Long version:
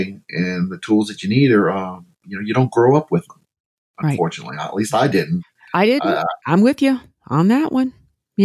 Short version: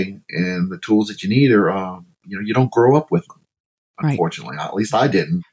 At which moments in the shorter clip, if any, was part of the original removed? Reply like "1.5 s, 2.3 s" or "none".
none